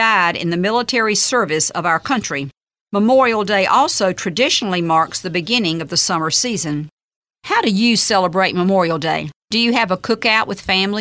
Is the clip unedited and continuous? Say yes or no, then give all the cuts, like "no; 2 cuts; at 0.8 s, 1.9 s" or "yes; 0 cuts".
no; 1 cut; at 9.4 s